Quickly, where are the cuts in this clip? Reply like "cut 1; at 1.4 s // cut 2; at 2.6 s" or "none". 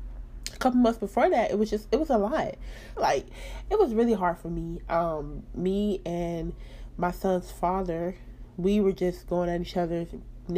cut 1; at 3.0 s